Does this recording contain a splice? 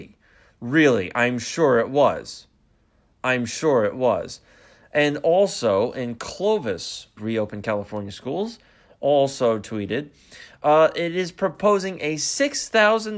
yes; 1 cut; at 7.2 s

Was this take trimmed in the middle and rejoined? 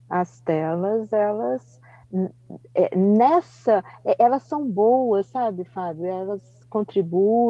no; 0 cuts

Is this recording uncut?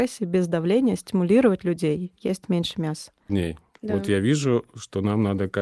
no; 1 cut; at 3.3 s

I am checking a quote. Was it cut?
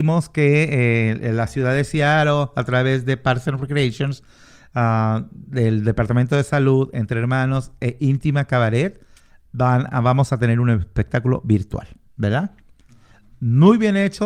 no; 0 cuts

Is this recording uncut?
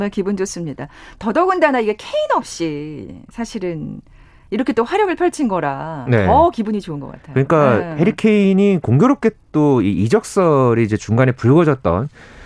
yes; 0 cuts

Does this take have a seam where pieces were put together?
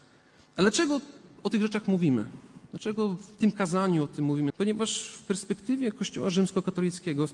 yes; 1 cut; at 4.5 s

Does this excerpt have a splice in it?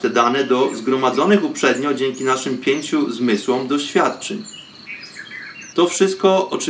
yes; 1 cut; at 5.7 s

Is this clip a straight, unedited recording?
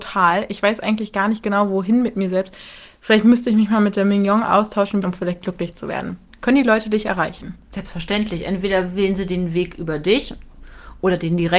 no; 1 cut; at 5.0 s

